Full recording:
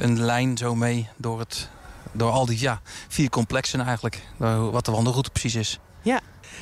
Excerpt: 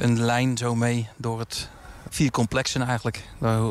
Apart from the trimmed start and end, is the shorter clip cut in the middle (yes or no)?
yes